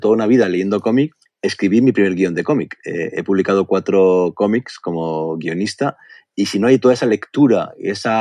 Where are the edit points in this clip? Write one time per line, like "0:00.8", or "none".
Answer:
none